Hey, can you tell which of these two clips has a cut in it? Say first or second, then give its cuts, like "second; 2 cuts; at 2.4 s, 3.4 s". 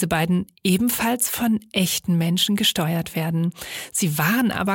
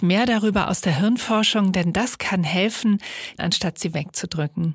second; 1 cut; at 3.4 s